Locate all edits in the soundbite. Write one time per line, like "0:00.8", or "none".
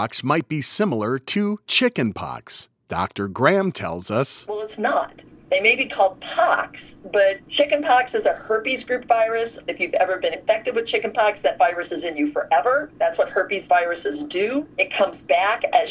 none